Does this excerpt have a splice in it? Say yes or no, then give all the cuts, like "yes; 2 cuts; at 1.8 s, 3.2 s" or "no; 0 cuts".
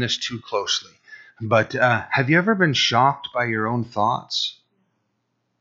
no; 0 cuts